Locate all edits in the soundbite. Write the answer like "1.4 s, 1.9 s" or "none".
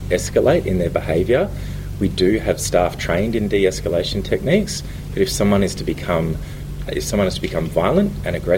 6.9 s